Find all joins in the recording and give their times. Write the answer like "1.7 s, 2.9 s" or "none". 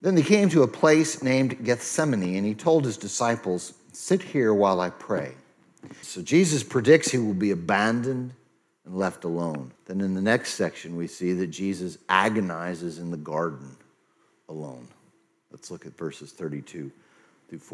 6.0 s, 9.8 s